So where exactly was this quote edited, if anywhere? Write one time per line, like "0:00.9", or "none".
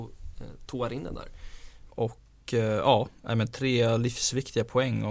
0:01.9

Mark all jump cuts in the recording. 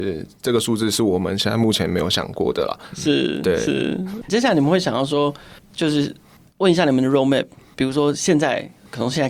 0:04.3

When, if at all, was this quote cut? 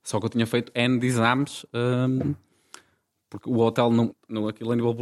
0:04.1

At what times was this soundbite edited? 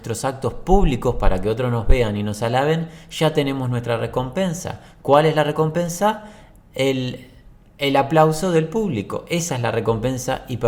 none

